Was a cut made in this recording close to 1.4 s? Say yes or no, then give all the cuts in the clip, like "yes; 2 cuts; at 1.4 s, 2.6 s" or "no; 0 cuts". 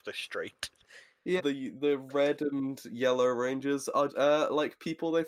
yes; 2 cuts; at 1.4 s, 4.1 s